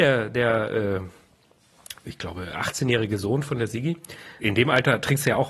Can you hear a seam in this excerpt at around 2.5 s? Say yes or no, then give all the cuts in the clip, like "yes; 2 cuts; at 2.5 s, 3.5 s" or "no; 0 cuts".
no; 1 cut; at 4.4 s